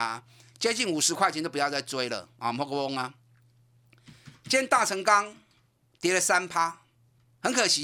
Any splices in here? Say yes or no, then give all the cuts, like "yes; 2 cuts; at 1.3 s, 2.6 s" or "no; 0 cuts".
no; 0 cuts